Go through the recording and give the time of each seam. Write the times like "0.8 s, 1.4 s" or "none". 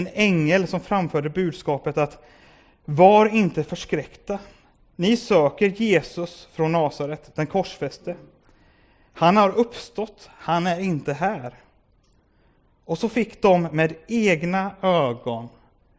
none